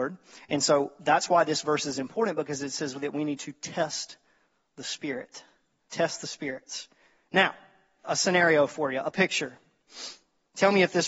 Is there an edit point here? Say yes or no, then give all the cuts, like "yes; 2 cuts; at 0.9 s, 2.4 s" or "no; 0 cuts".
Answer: yes; 1 cut; at 8.0 s